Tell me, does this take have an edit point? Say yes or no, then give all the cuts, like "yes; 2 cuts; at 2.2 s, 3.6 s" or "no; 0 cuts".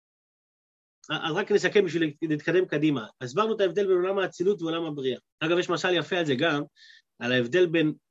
yes; 1 cut; at 5.3 s